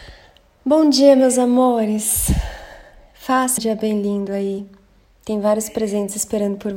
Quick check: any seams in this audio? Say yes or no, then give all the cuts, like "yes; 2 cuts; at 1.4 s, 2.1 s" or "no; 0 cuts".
yes; 2 cuts; at 3.6 s, 5.1 s